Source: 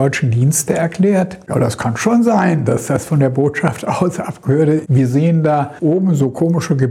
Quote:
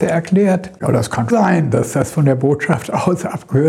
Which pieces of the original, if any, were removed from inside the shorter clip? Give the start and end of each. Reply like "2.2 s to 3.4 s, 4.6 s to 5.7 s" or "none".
2.0 s to 2.2 s